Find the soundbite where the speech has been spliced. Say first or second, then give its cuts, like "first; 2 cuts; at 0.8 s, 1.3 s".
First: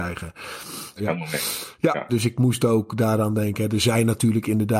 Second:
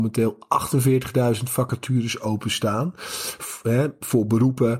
first; 2 cuts; at 1.0 s, 2.1 s